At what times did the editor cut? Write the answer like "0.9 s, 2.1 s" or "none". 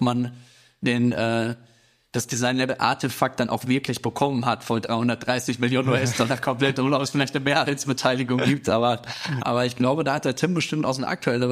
9.4 s